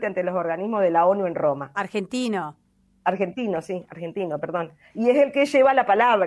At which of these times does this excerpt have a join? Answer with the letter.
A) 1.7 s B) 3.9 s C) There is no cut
A